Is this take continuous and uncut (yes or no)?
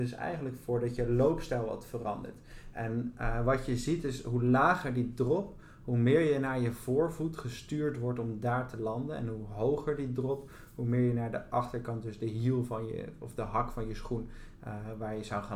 yes